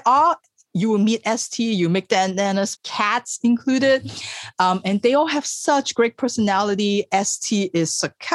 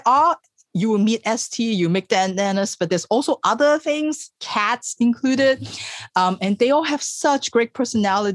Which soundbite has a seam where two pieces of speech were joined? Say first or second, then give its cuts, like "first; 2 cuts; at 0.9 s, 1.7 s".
first; 1 cut; at 2.8 s